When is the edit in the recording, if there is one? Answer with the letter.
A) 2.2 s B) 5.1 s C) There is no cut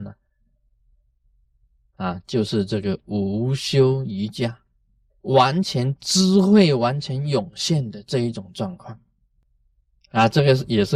B